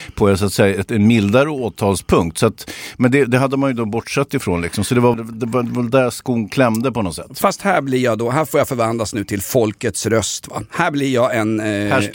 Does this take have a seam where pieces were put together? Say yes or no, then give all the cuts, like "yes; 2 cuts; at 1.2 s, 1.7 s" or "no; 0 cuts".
yes; 1 cut; at 5.1 s